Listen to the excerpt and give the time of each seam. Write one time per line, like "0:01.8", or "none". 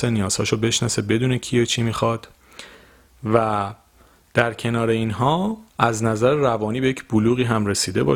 0:05.7